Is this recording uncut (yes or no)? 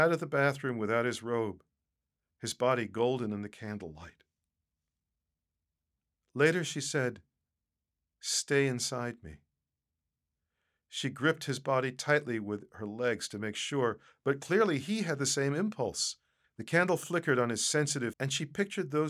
no